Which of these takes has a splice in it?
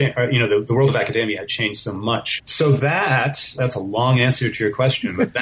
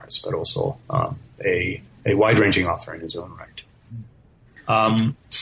first; 2 cuts; at 2.4 s, 3.6 s

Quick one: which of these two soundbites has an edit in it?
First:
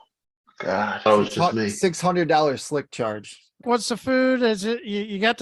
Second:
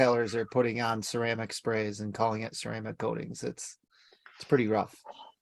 first; 2 cuts; at 1.1 s, 3.6 s

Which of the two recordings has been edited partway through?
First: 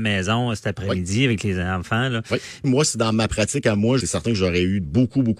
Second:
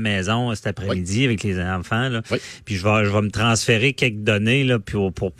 first; 2 cuts; at 2.6 s, 4.0 s

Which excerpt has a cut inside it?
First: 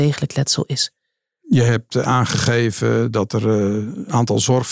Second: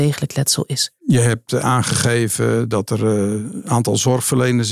second; 1 cut; at 1.0 s

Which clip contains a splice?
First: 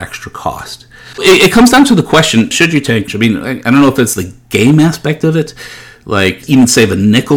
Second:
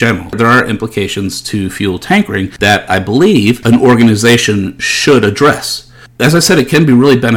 first; 2 cuts; at 1.1 s, 3.1 s

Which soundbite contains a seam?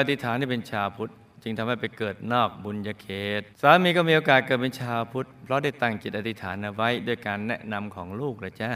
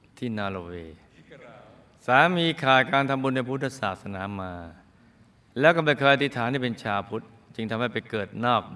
first; 1 cut; at 3.5 s

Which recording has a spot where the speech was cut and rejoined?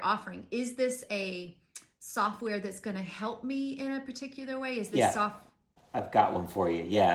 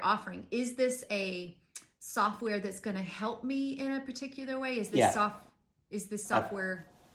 first; 1 cut; at 5.8 s

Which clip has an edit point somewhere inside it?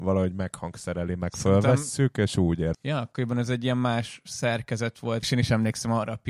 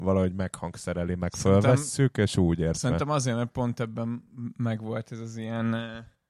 first; 2 cuts; at 2.7 s, 5.2 s

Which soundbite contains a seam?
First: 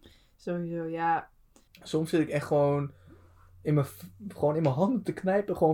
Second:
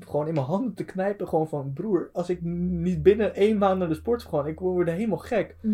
first; 1 cut; at 1.7 s

